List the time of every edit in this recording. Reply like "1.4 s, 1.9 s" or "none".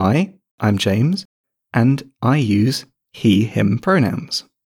none